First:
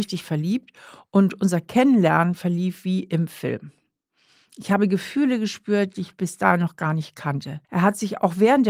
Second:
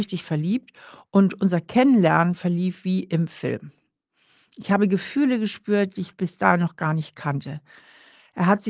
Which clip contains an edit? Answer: first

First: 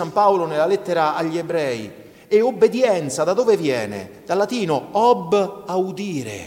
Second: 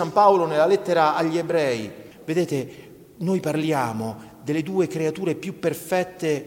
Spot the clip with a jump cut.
second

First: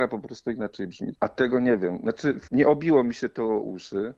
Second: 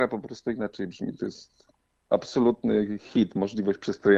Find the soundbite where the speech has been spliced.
first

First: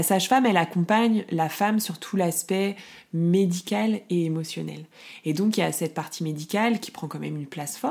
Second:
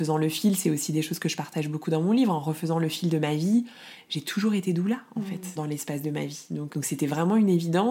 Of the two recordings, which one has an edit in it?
second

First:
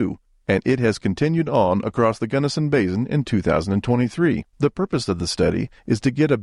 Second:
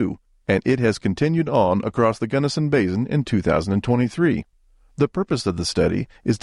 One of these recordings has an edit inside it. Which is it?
first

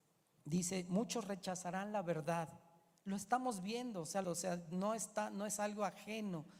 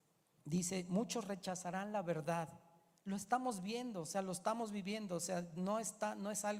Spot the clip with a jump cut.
first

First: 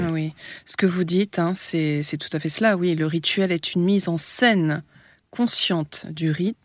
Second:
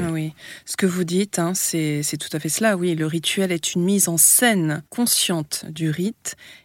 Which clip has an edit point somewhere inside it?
second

